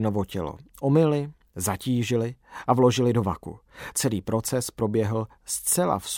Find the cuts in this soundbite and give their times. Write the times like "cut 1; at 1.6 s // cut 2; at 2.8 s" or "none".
cut 1; at 1.5 s